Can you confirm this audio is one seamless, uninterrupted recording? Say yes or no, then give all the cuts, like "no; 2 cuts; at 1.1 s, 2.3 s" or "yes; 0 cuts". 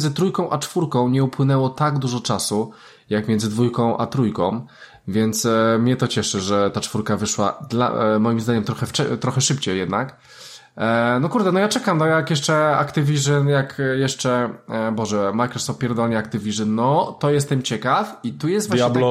yes; 0 cuts